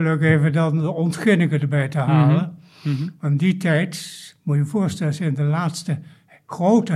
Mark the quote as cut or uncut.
uncut